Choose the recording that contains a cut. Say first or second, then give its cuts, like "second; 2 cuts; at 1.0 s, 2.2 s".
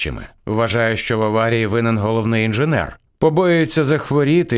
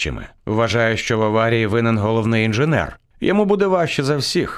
first; 1 cut; at 3.1 s